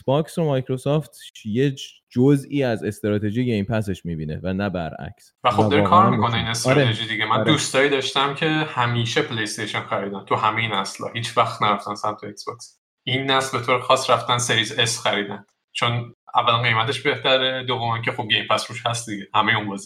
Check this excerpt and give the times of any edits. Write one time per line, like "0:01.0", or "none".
0:05.4